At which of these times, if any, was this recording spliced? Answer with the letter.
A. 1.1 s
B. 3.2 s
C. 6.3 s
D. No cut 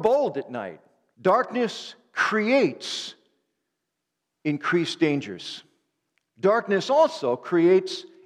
A